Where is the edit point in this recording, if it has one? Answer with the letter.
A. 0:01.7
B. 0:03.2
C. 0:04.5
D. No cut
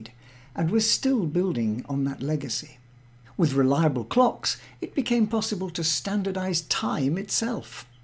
B